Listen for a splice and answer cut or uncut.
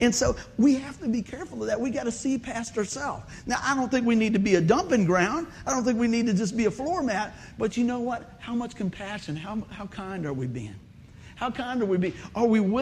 uncut